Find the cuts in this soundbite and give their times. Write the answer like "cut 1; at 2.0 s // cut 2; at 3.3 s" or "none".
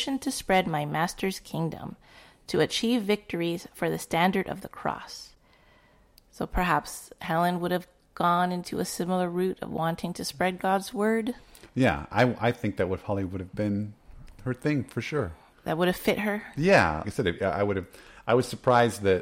cut 1; at 17.0 s